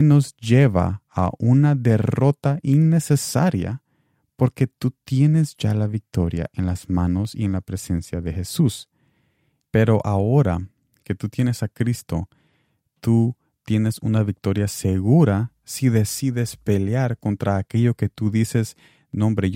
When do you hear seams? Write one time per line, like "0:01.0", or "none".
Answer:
0:09.6